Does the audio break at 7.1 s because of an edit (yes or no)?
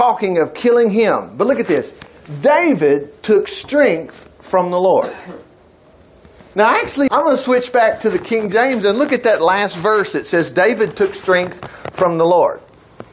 yes